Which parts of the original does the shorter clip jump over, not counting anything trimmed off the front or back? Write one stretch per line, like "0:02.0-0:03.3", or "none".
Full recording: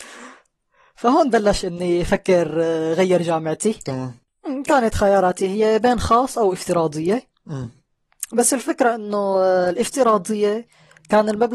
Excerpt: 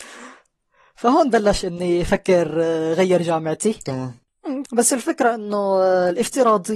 0:04.7-0:08.3